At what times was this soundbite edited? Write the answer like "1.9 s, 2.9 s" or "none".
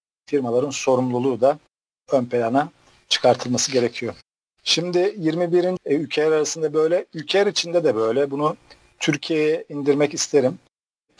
5.8 s